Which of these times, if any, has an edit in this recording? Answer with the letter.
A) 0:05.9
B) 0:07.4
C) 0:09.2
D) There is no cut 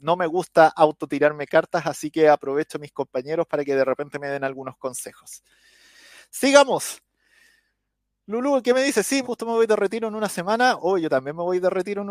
C